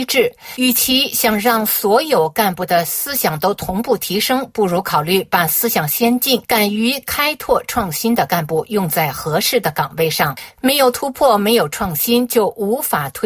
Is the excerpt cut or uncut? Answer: uncut